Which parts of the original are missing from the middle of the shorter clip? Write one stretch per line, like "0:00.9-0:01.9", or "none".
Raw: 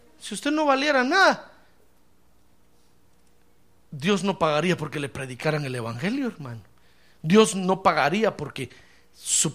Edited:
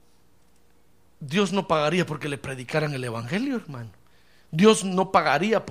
none